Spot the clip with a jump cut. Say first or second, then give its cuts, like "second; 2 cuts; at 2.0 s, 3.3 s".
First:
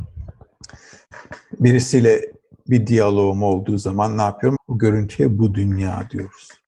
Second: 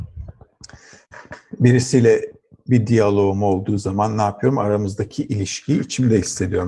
first; 1 cut; at 4.6 s